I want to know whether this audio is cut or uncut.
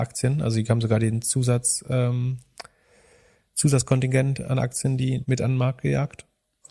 cut